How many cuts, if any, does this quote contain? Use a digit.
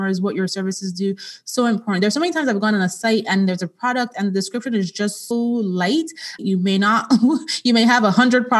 2